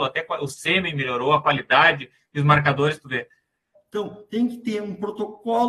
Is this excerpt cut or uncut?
cut